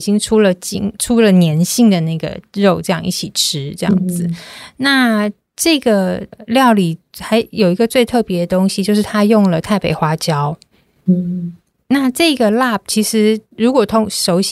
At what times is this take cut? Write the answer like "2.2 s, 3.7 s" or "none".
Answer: 1.0 s